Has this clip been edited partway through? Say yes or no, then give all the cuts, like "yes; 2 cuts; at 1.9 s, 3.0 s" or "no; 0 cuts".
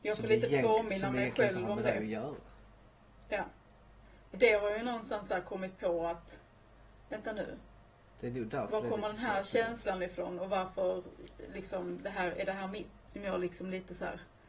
yes; 2 cuts; at 4.3 s, 13.0 s